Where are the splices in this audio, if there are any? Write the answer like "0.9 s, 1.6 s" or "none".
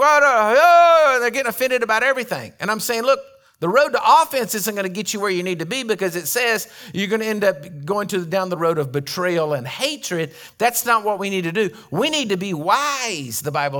none